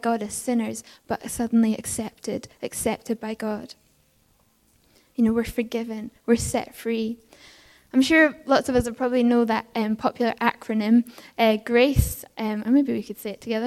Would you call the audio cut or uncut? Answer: cut